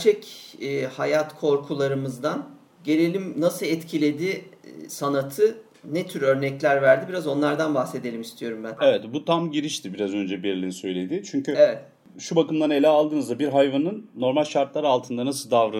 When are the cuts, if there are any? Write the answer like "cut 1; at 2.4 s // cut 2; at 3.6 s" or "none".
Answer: none